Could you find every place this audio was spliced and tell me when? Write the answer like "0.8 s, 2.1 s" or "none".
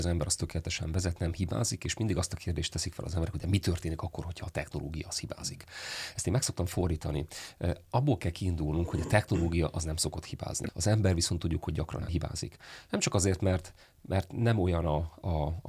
none